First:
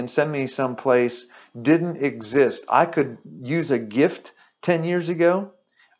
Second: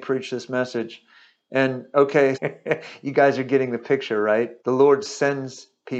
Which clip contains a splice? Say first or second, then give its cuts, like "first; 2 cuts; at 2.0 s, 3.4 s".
second; 2 cuts; at 2.3 s, 4.6 s